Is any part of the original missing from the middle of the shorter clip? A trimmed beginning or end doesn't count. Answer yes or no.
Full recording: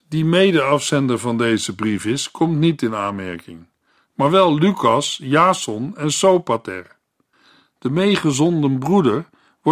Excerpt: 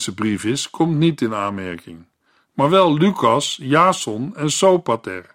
no